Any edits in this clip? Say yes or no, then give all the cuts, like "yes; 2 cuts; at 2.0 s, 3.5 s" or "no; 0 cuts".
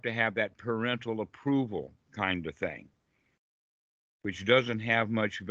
no; 0 cuts